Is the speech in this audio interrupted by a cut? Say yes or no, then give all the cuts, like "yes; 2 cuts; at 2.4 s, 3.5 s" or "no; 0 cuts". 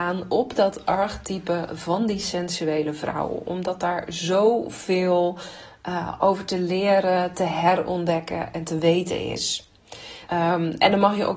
yes; 1 cut; at 10.3 s